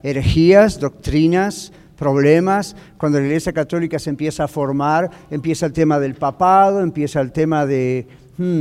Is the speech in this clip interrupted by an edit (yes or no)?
no